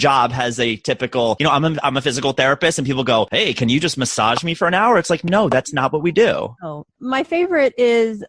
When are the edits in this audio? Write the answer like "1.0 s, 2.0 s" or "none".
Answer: none